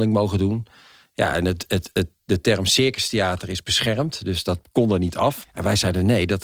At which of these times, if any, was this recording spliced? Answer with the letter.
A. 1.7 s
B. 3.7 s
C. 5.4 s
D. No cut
C